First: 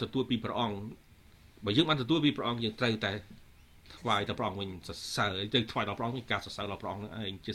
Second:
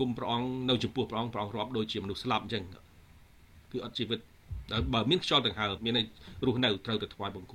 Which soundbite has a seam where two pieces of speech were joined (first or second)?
second